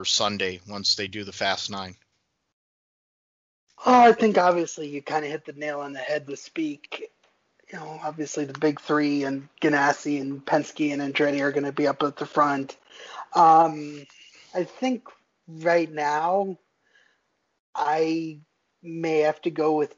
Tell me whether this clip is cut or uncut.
cut